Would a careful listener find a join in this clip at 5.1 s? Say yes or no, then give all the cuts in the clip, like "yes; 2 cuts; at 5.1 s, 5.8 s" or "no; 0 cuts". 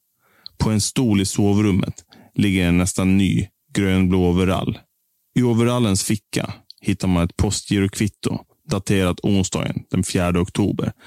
no; 0 cuts